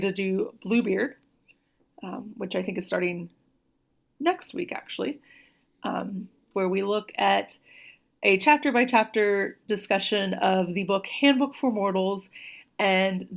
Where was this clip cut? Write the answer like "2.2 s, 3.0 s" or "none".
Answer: 6.5 s